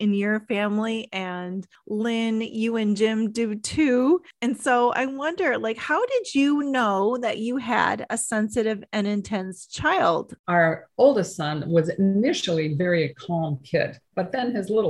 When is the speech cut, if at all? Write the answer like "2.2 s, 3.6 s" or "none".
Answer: 10.4 s